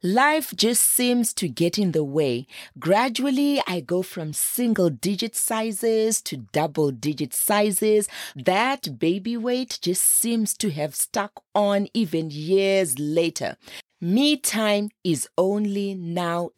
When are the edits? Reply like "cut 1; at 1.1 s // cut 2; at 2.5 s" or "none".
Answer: cut 1; at 8.3 s